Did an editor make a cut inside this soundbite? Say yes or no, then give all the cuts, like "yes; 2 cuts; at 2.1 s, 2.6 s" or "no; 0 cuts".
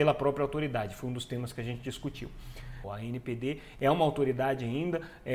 yes; 1 cut; at 2.8 s